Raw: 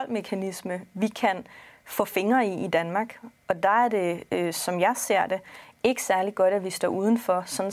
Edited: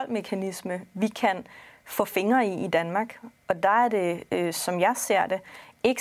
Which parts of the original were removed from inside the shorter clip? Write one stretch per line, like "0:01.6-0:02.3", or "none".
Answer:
none